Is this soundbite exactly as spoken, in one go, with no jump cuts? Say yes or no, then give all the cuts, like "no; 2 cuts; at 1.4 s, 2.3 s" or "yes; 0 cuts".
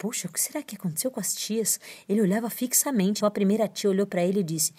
no; 1 cut; at 3.2 s